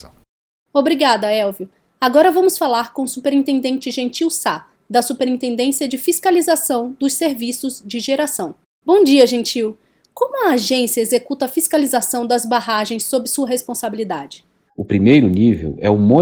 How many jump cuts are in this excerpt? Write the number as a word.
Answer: one